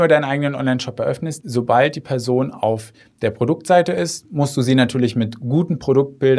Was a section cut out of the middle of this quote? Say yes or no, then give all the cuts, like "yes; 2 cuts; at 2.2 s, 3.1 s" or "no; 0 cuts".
no; 0 cuts